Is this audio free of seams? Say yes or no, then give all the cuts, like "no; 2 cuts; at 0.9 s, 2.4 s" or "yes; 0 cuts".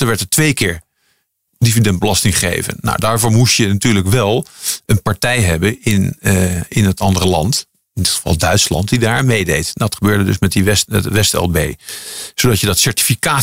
yes; 0 cuts